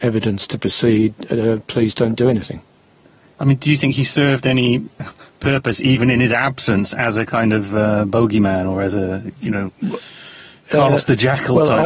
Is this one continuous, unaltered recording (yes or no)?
yes